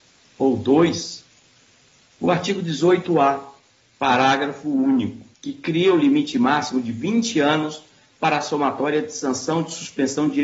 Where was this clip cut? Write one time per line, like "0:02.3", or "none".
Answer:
0:05.3